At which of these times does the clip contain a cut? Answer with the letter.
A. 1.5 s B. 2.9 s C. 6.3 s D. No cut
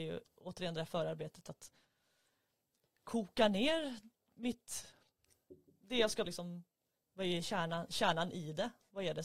C